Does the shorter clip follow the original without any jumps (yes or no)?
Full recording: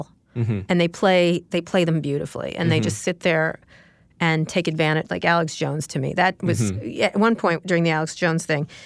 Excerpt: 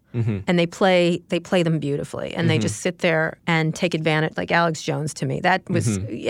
no